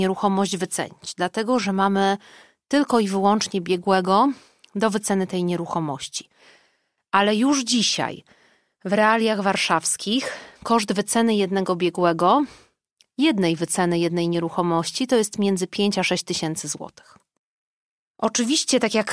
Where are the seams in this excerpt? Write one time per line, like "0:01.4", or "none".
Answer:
none